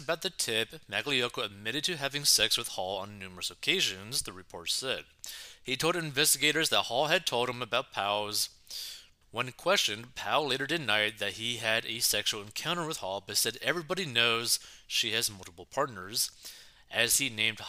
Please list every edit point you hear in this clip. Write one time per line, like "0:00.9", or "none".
0:09.2